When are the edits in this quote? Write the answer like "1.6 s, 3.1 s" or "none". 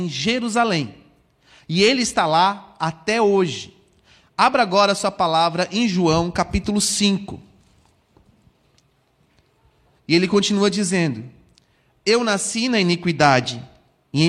10.0 s